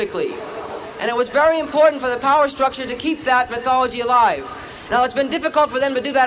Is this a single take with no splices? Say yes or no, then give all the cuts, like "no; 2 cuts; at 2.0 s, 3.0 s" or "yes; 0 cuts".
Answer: no; 1 cut; at 4.9 s